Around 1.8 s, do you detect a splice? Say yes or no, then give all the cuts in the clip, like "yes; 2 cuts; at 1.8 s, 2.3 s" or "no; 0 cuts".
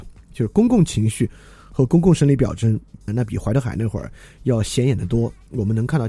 no; 1 cut; at 3.1 s